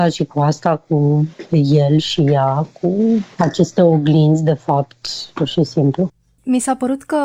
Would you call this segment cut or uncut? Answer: cut